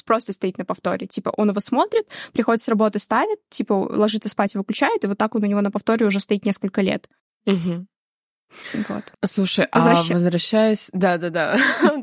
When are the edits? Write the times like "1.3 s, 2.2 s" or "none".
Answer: 9.1 s